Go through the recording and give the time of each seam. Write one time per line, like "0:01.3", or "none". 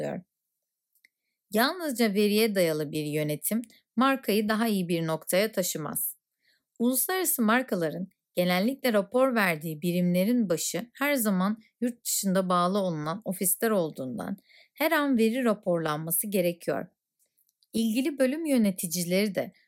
none